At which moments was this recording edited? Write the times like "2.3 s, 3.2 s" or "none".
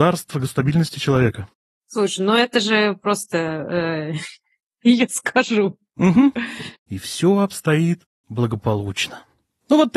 4.8 s, 6.7 s